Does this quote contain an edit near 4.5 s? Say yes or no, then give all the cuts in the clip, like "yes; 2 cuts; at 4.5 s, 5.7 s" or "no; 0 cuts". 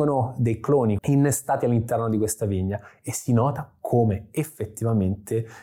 no; 1 cut; at 1.0 s